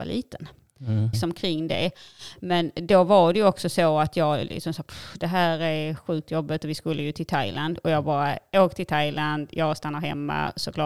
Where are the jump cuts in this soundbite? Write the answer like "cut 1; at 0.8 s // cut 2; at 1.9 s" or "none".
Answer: cut 1; at 1.1 s